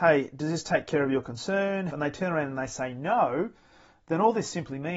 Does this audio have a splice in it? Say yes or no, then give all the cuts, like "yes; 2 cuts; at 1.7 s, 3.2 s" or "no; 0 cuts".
yes; 1 cut; at 1.9 s